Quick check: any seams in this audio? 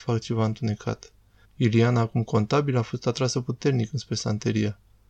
yes; 1 cut; at 1.4 s

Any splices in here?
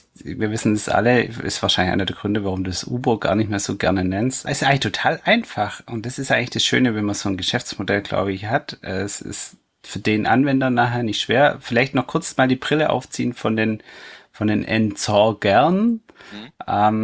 yes; 1 cut; at 4.5 s

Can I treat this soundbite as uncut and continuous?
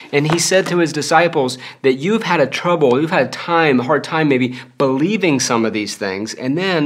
yes; 0 cuts

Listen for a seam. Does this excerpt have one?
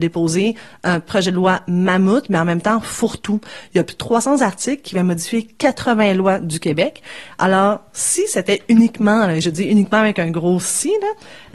no; 0 cuts

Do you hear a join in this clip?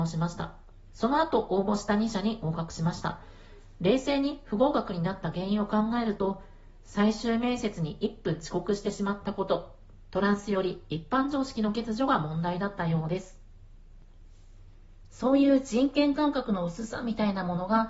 yes; 2 cuts; at 10.1 s, 15.1 s

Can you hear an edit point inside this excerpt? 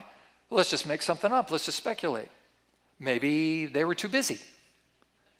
no; 0 cuts

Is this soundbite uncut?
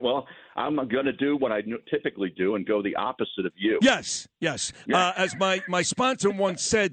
yes; 0 cuts

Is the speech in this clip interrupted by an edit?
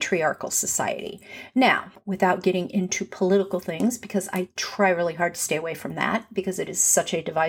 no; 0 cuts

